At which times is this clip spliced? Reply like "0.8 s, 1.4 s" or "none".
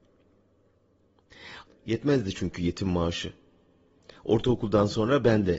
1.7 s